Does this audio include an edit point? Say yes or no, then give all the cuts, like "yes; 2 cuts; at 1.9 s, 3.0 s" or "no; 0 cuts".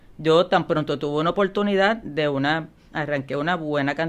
yes; 1 cut; at 2.9 s